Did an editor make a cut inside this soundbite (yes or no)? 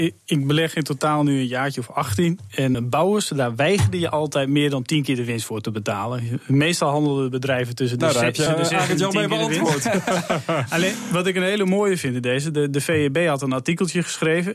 yes